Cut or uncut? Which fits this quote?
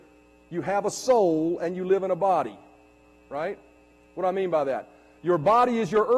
uncut